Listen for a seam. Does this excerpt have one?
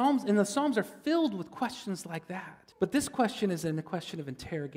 yes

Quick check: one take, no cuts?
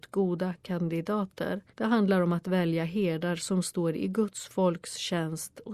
no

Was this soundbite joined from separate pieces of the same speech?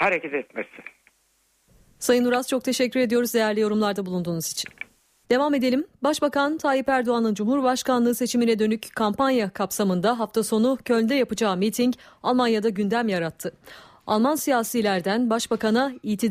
yes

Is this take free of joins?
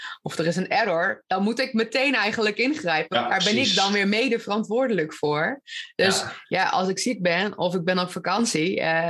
no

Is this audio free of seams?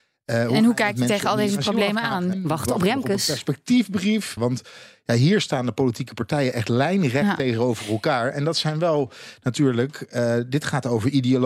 no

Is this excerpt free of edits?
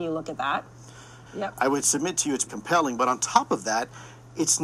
no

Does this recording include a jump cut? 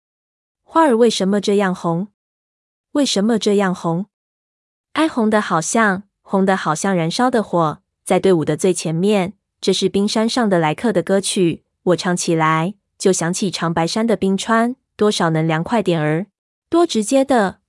yes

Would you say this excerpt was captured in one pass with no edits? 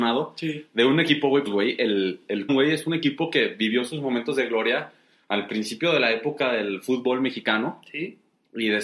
no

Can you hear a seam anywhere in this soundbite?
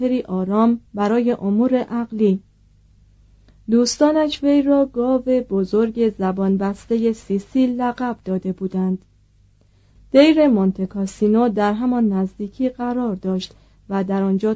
yes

